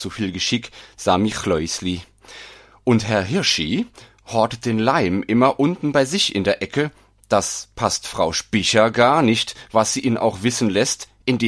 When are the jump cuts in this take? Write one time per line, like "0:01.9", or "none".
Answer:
none

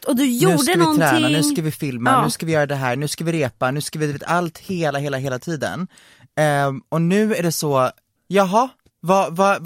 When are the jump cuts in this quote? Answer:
none

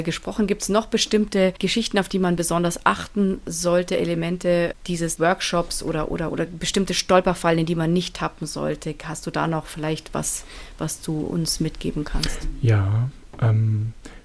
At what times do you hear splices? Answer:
0:06.3

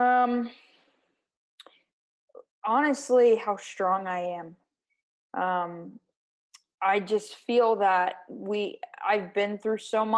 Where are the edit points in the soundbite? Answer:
none

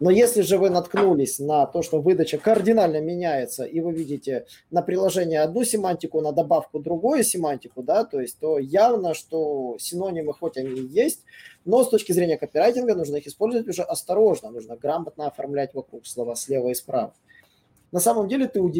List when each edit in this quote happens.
0:17.9

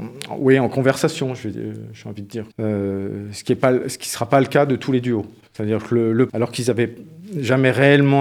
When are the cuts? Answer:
0:02.5
0:06.3

